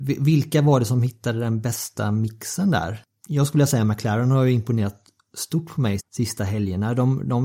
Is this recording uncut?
no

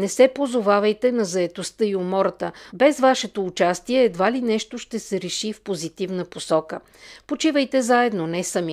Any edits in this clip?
yes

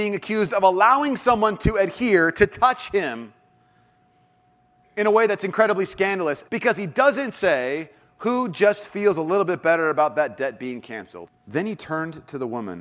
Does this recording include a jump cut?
yes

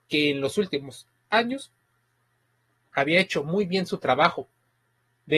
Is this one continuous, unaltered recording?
yes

